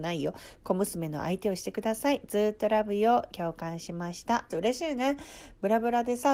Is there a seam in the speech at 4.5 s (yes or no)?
yes